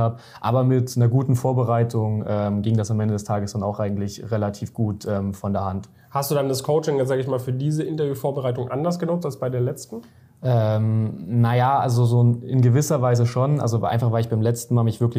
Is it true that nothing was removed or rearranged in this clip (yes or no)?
yes